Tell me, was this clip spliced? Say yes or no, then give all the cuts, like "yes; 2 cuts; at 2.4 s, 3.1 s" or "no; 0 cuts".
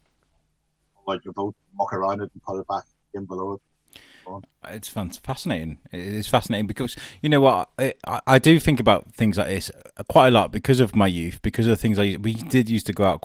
no; 0 cuts